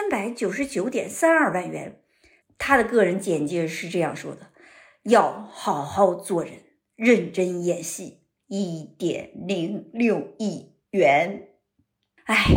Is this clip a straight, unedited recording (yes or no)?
no